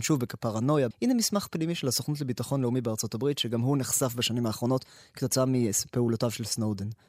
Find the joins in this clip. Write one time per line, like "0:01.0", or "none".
0:00.9